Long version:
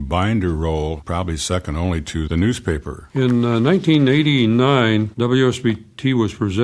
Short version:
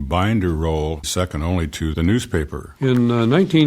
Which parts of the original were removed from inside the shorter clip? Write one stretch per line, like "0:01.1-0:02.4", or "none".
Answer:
0:01.0-0:01.4